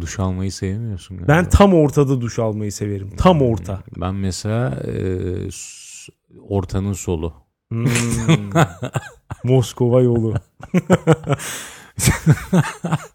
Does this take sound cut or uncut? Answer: uncut